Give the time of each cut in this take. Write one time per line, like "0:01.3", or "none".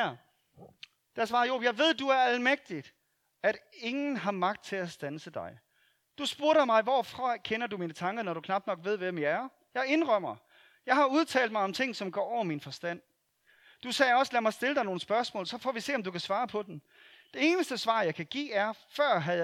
none